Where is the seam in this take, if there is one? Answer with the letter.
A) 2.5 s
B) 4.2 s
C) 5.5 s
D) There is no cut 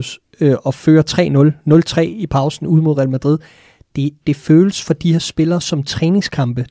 B